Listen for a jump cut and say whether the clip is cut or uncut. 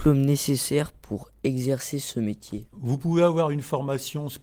cut